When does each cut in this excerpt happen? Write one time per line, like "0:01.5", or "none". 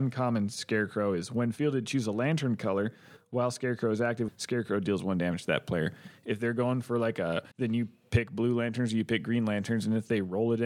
0:04.3
0:07.5